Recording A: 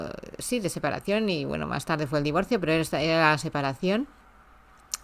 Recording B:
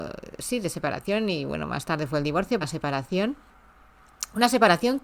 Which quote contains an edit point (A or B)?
B